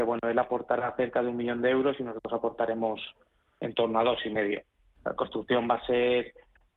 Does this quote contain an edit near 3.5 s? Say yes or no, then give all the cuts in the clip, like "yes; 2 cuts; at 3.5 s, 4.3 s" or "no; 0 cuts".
no; 1 cut; at 5.0 s